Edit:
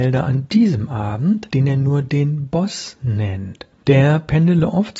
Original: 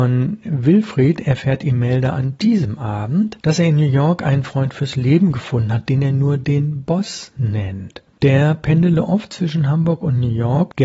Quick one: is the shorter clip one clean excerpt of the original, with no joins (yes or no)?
no